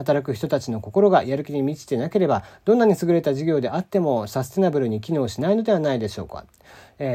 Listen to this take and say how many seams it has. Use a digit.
0